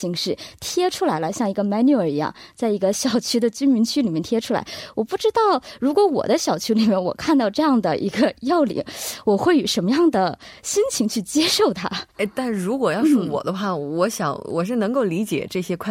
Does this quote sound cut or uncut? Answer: cut